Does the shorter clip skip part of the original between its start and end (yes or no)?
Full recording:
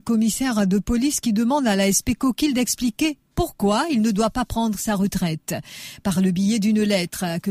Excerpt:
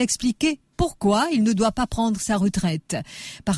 no